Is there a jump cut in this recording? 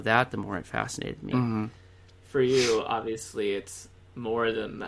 yes; 1 cut; at 1.3 s

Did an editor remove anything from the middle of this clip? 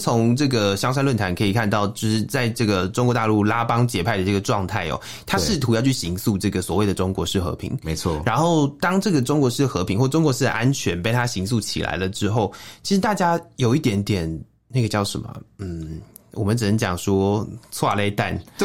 no; 0 cuts

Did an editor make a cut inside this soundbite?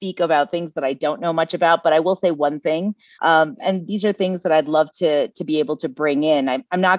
yes; 1 cut; at 3.1 s

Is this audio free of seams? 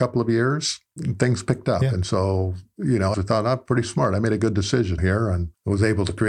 no; 2 cuts; at 3.1 s, 5.0 s

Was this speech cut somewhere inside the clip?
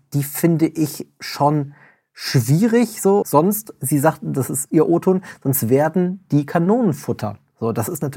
yes; 1 cut; at 3.2 s

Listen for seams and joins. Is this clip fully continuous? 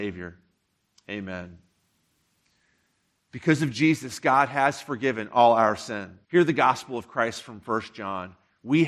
no; 1 cut; at 6.2 s

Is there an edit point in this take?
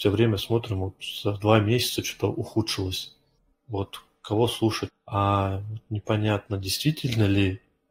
yes; 2 cuts; at 3.5 s, 4.9 s

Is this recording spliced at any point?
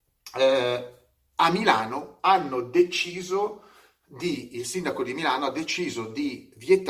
no; 0 cuts

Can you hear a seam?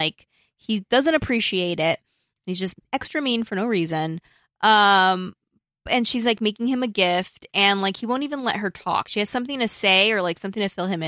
no; 0 cuts

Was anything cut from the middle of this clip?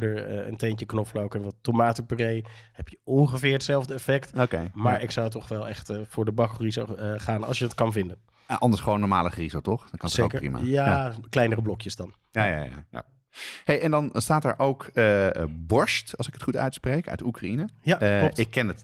no; 0 cuts

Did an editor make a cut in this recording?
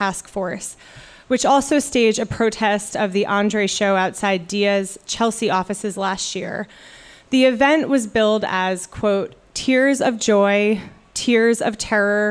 no; 0 cuts

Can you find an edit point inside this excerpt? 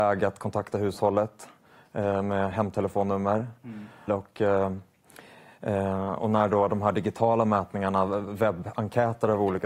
yes; 1 cut; at 4.1 s

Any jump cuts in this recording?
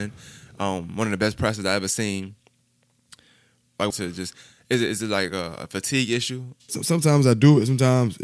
yes; 2 cuts; at 3.9 s, 6.7 s

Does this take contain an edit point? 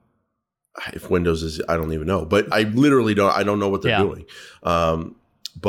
yes; 1 cut; at 2.5 s

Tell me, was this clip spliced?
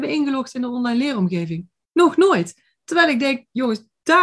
no; 0 cuts

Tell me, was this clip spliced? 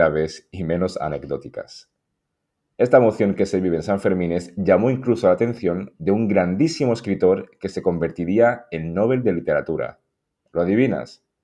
no; 0 cuts

